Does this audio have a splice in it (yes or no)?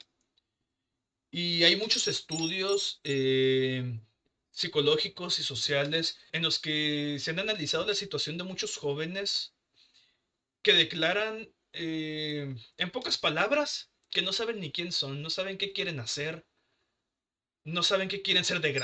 yes